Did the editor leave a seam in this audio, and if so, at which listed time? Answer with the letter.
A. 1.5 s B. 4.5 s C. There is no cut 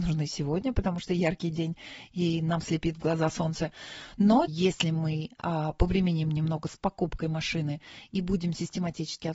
B